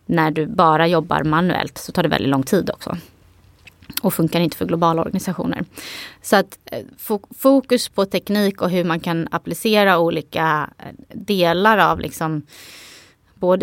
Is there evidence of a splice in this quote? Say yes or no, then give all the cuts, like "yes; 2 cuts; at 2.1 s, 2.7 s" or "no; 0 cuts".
no; 0 cuts